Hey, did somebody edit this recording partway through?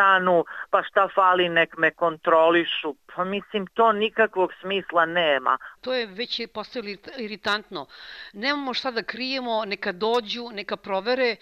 no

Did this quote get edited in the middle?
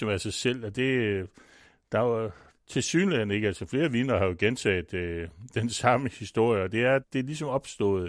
yes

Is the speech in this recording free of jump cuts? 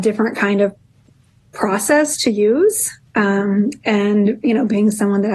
yes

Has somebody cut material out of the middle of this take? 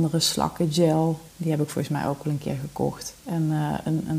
yes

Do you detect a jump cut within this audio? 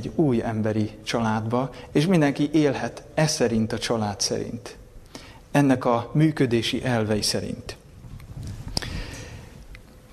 yes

